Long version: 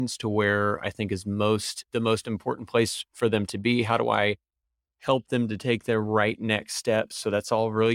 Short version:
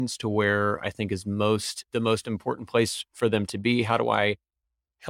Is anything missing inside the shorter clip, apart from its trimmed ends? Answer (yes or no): no